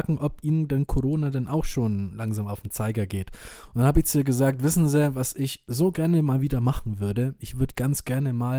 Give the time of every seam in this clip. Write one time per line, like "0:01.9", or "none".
none